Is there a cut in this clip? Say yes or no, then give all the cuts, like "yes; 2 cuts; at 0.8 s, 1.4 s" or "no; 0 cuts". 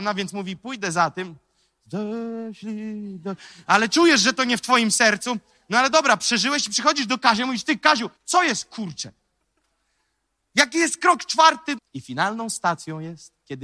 yes; 2 cuts; at 8.2 s, 11.8 s